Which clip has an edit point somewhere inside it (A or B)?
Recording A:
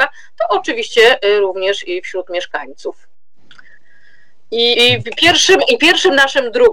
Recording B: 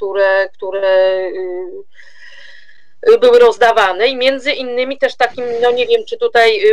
A